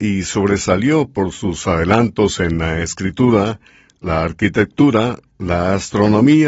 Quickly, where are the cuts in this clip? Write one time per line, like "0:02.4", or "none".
none